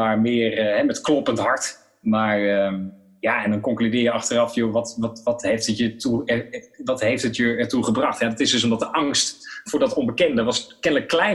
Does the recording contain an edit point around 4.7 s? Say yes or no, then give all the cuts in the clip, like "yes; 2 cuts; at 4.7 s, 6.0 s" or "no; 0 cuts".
no; 0 cuts